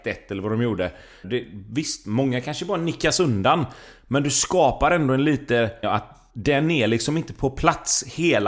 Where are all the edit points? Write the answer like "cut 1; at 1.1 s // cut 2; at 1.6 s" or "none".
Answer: cut 1; at 1.2 s // cut 2; at 5.8 s